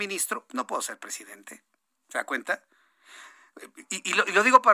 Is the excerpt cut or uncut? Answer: uncut